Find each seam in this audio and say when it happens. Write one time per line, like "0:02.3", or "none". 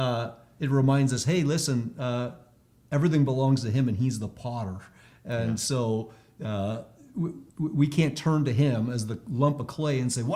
0:07.5

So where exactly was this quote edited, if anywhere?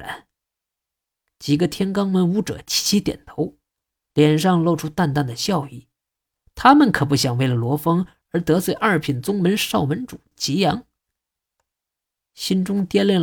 0:12.3

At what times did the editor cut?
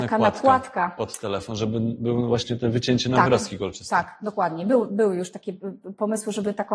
none

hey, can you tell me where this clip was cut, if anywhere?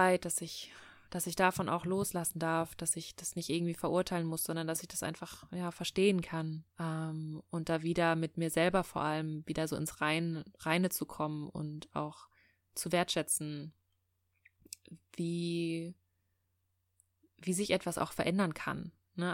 0:06.7

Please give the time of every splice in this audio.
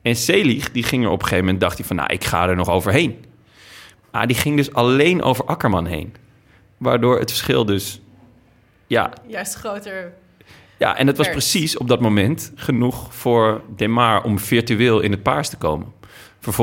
none

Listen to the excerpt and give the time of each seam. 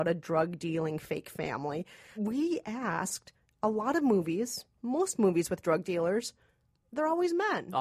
0:02.1

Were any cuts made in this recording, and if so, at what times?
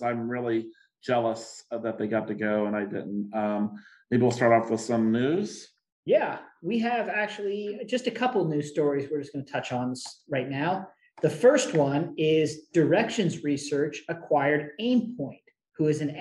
none

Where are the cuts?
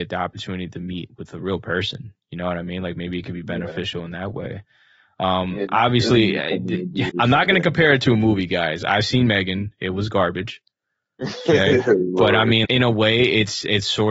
0:07.1
0:12.7

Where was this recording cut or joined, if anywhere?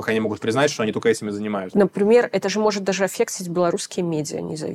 0:01.7

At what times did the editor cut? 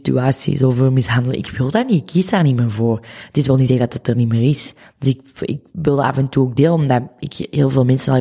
none

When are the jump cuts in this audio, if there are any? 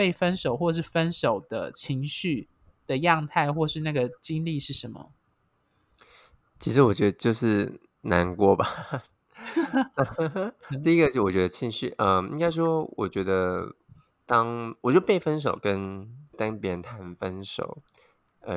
0:16.3

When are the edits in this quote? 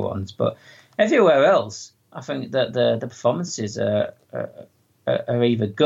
none

